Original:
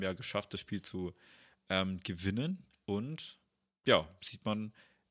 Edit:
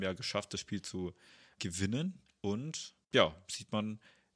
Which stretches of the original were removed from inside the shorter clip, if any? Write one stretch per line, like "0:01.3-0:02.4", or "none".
0:01.6-0:02.0
0:03.5-0:03.8